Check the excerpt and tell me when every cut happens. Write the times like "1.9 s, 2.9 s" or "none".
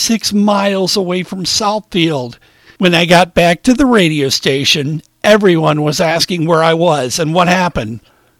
2.8 s